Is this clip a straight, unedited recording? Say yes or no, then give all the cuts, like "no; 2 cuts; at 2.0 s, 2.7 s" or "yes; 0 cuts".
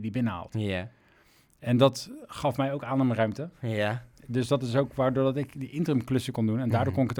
yes; 0 cuts